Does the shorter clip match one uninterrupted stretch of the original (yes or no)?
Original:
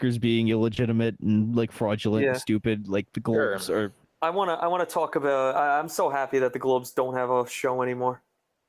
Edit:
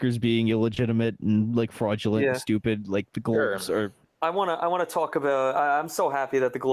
yes